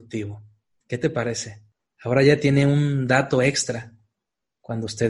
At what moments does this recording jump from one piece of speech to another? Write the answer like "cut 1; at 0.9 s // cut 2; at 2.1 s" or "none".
cut 1; at 1.9 s

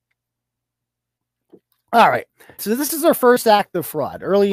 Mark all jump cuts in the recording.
cut 1; at 2.6 s

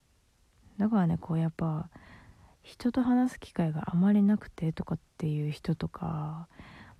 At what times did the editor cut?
none

